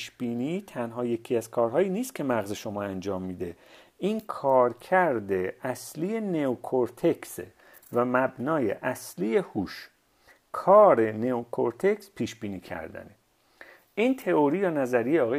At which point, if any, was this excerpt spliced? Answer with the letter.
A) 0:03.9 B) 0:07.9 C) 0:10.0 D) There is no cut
D